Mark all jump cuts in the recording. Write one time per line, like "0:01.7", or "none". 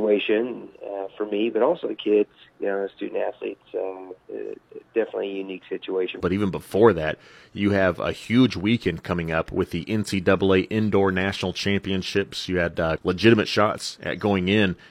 0:06.2
0:13.0